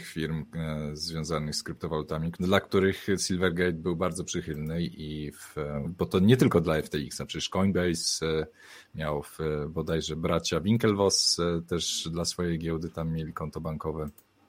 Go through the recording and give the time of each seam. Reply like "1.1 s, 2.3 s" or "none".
2.3 s, 5.8 s